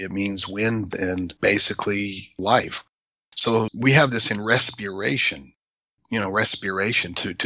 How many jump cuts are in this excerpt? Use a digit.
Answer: 1